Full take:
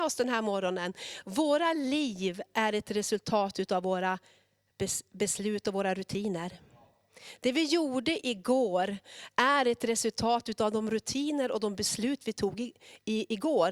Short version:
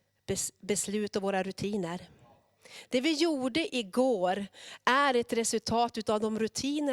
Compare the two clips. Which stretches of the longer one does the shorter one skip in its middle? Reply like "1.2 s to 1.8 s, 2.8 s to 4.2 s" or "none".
none